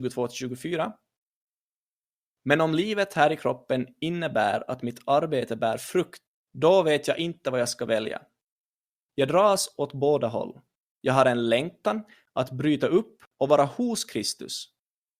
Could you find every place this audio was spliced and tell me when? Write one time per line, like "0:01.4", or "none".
none